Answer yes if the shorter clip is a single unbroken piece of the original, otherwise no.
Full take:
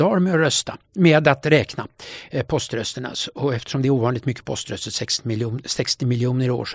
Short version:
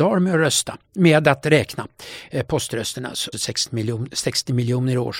no